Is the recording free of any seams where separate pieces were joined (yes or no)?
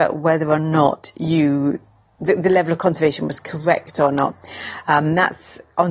yes